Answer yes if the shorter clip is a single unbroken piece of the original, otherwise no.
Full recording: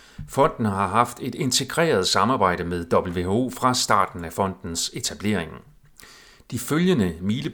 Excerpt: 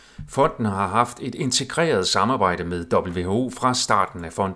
yes